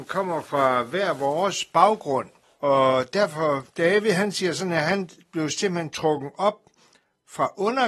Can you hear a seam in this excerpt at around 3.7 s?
yes; 1 cut; at 3.7 s

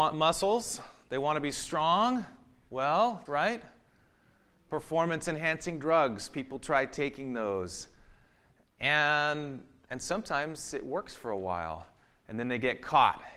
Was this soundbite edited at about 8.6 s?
no; 1 cut; at 3.3 s

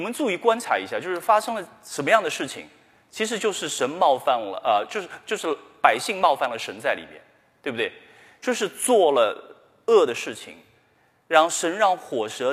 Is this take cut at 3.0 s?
no; 0 cuts

